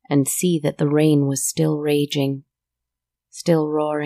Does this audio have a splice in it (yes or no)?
no